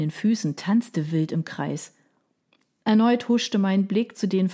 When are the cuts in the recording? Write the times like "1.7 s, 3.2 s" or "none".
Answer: none